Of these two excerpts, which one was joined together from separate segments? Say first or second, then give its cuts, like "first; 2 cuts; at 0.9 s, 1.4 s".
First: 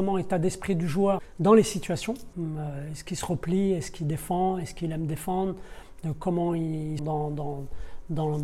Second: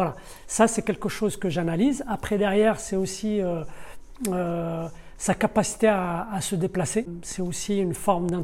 first; 2 cuts; at 2.3 s, 7.0 s